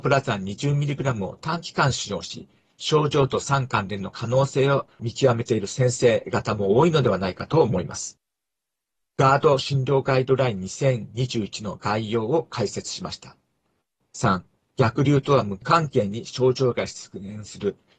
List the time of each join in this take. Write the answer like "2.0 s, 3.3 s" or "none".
14.0 s

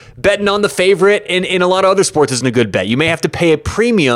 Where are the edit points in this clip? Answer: none

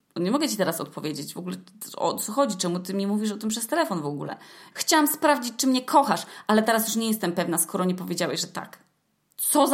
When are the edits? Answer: 4.7 s

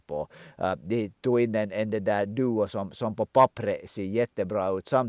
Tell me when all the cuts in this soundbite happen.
none

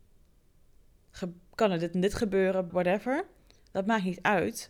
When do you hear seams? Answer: 2.7 s

